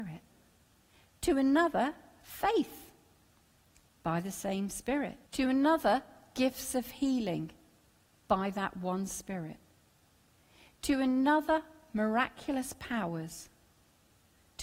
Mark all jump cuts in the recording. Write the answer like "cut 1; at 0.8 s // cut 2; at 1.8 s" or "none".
cut 1; at 5.3 s